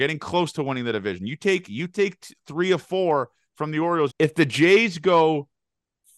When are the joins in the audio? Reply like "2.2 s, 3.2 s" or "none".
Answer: 4.1 s